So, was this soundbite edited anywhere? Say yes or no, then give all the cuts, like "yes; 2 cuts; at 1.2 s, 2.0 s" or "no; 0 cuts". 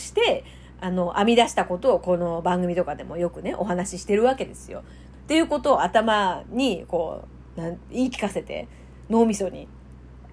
yes; 2 cuts; at 5.1 s, 7.5 s